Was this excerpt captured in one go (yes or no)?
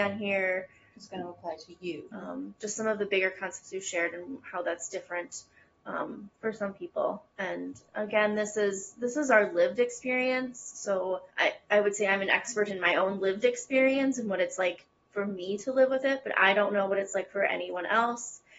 no